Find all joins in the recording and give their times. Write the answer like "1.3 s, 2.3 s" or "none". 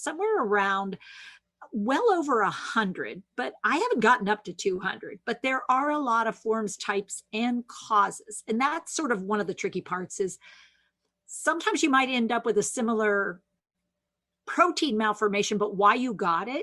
none